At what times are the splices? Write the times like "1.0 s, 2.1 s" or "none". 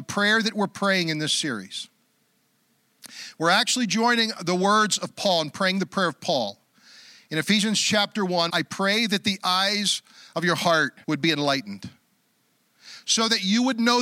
8.5 s, 11.0 s